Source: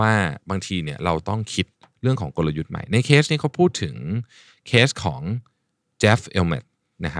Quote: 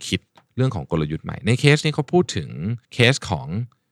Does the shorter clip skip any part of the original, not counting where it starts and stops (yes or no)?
yes